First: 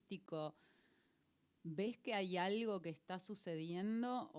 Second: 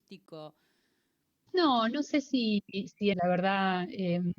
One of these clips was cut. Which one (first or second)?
second